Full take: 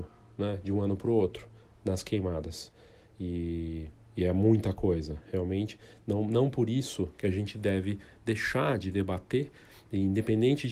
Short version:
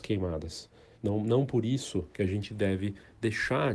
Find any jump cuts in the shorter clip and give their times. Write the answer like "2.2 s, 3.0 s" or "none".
0.9 s